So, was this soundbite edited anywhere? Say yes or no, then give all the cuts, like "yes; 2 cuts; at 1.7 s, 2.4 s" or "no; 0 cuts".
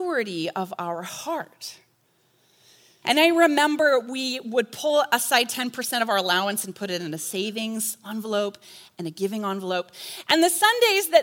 yes; 1 cut; at 3.0 s